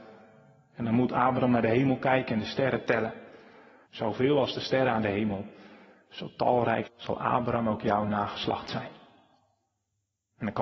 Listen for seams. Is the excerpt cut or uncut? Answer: cut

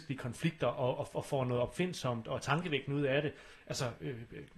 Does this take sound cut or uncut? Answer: cut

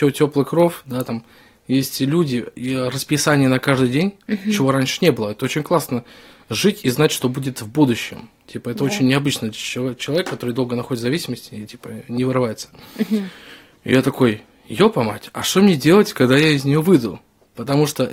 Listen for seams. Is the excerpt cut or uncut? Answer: uncut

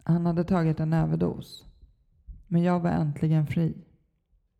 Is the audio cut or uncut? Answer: uncut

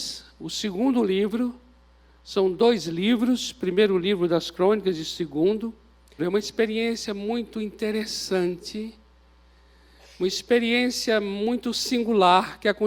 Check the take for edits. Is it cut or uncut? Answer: cut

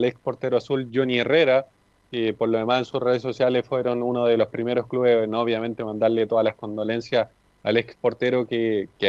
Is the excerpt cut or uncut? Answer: uncut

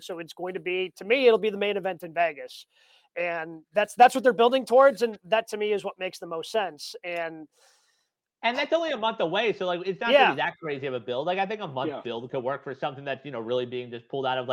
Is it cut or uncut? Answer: uncut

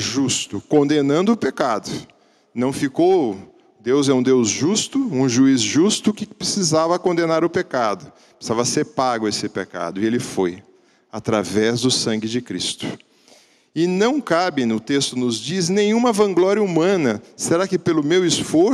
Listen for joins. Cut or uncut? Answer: uncut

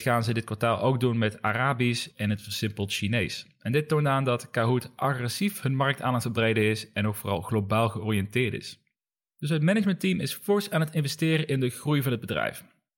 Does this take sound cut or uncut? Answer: uncut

